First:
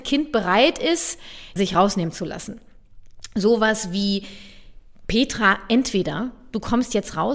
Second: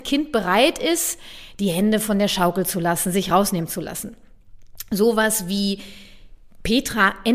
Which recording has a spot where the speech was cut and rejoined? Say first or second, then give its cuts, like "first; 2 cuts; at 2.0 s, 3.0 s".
first; 1 cut; at 1.6 s